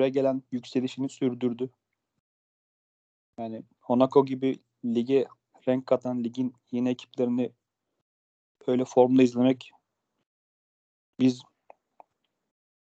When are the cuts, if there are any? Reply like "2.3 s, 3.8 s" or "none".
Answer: none